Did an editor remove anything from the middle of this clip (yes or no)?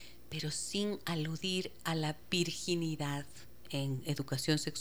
yes